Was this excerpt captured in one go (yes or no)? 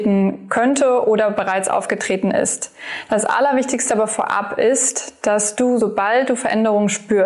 yes